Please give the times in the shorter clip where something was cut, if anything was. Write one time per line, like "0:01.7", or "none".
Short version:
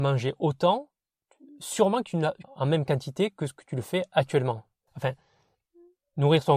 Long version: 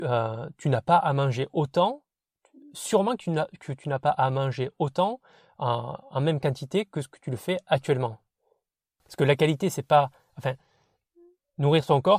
0:02.4
0:04.9